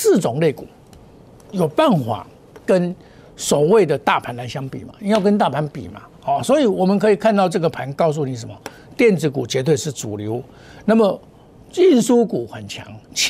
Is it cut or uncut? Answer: uncut